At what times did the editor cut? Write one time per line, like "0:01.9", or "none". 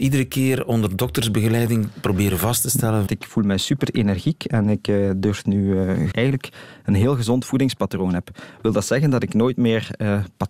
0:03.1
0:06.1